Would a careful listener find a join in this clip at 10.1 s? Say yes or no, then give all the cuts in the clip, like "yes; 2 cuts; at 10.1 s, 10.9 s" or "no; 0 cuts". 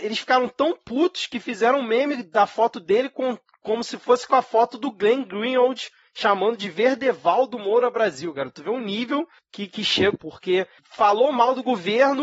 yes; 1 cut; at 10.1 s